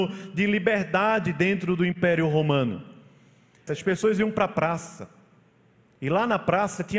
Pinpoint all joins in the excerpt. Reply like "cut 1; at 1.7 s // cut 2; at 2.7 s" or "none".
cut 1; at 3.7 s